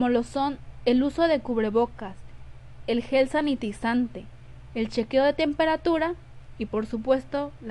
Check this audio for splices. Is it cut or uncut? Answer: uncut